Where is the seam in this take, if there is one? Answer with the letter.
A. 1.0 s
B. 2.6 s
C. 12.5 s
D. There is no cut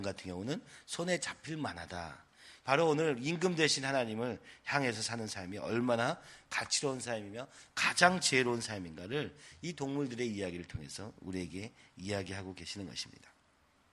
B